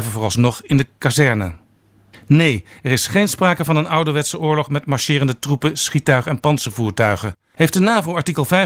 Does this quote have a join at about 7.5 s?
yes; 1 cut; at 7.5 s

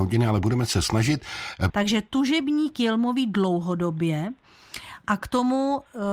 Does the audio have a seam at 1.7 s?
yes; 1 cut; at 1.7 s

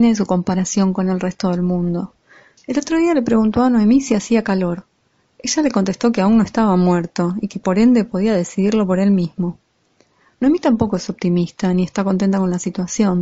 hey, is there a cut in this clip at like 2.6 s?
yes; 1 cut; at 2.6 s

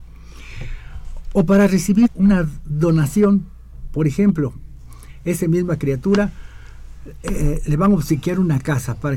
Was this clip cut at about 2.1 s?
yes; 1 cut; at 2.1 s

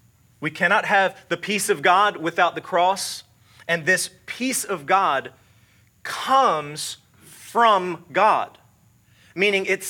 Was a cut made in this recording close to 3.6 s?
no; 0 cuts

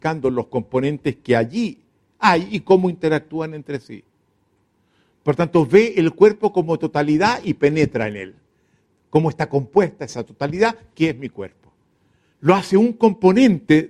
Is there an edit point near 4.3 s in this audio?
no; 1 cut; at 12.3 s

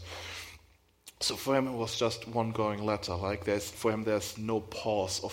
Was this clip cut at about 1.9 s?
no; 1 cut; at 3.7 s

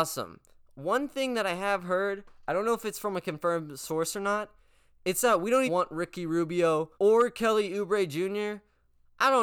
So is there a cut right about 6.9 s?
yes; 2 cuts; at 5.7 s, 6.9 s

